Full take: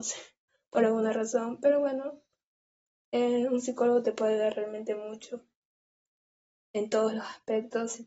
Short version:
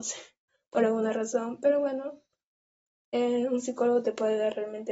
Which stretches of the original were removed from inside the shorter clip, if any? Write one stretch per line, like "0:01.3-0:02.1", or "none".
none

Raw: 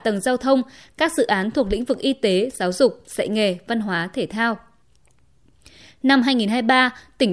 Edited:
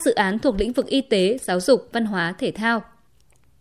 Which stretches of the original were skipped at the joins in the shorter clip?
0:03.0-0:03.7

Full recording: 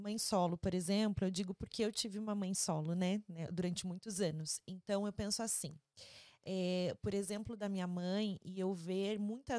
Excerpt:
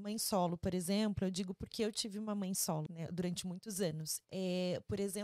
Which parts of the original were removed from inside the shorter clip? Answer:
0:02.9-0:03.3
0:04.6-0:06.4

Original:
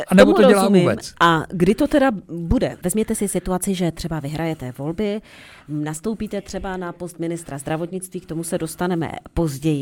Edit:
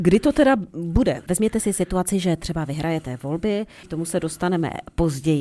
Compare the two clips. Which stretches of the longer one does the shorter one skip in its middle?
0:05.4-0:08.2

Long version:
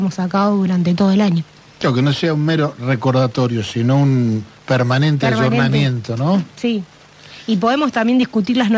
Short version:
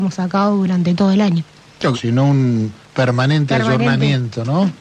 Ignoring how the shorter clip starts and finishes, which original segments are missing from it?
0:01.9-0:03.7

